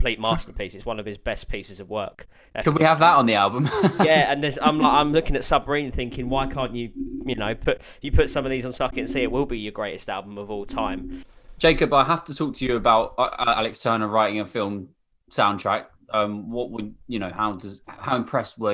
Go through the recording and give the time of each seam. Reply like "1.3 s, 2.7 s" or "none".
17.8 s